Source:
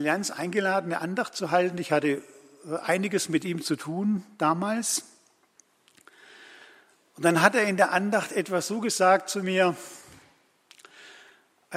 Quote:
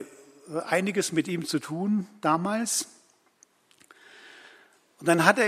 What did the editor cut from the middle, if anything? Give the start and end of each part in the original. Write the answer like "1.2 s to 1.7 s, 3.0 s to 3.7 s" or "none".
none